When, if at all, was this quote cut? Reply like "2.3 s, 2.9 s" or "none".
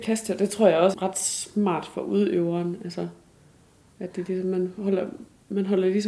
0.9 s